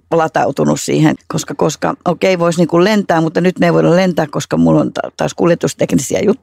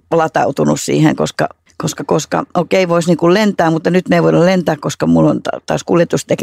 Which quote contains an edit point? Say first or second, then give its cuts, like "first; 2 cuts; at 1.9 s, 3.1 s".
first; 1 cut; at 1.2 s